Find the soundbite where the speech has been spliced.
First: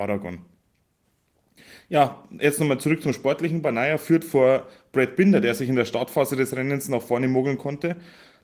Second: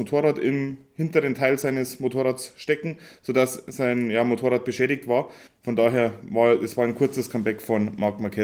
second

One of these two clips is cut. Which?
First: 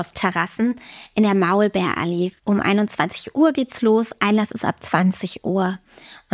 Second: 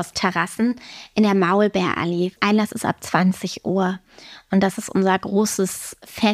second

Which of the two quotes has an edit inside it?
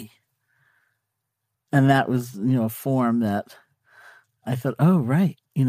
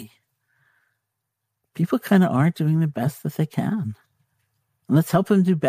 first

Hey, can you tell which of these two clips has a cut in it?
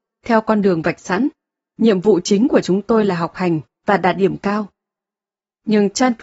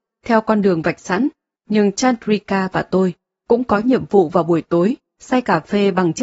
second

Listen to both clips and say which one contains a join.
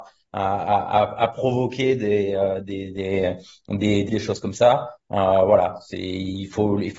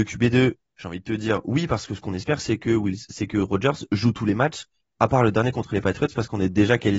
first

